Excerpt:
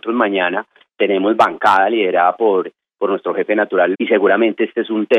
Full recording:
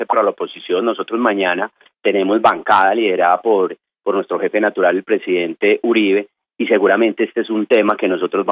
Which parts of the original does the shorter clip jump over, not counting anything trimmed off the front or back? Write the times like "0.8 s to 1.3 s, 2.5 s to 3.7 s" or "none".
5.0 s to 6.5 s